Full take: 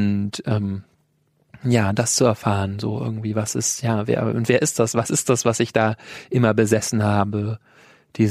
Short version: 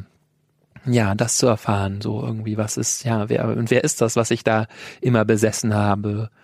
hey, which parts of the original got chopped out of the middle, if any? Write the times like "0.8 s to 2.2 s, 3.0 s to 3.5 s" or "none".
4.9 s to 5.4 s